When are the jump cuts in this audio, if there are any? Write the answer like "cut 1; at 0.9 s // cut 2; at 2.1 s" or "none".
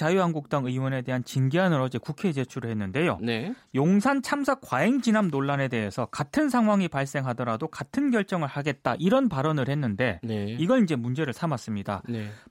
none